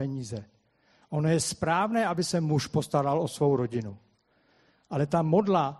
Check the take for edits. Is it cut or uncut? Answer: uncut